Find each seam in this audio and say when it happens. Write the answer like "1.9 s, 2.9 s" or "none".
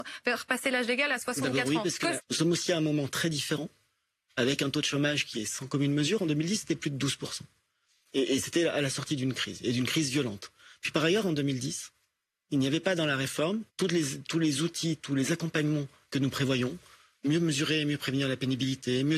2.2 s, 13.7 s